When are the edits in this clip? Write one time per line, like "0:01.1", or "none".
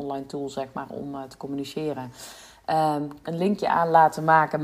0:03.2